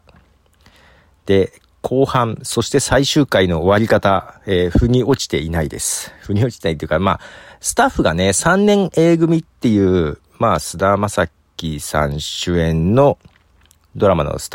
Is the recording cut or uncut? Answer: uncut